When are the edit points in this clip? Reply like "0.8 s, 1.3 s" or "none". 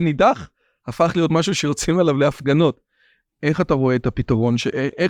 3.3 s